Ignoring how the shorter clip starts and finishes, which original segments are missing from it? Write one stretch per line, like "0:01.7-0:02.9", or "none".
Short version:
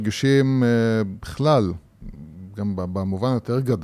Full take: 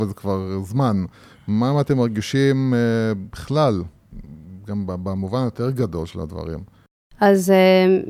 none